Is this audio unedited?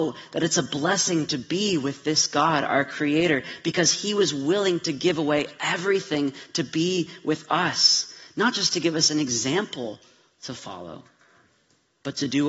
yes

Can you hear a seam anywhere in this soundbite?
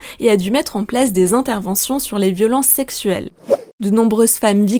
yes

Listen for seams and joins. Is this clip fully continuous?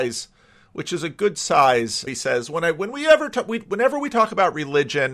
no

